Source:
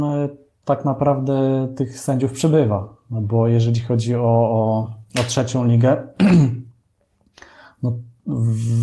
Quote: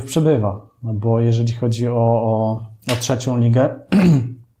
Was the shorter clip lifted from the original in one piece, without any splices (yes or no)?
yes